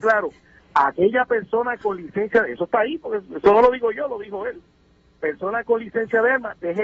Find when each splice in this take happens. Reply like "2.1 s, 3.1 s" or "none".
none